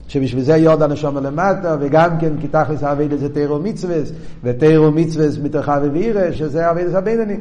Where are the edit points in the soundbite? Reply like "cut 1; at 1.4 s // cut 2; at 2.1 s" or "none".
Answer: cut 1; at 6.4 s